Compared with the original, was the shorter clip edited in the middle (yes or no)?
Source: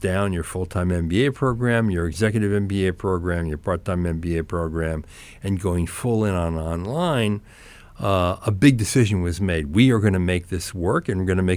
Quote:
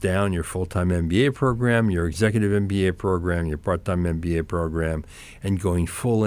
no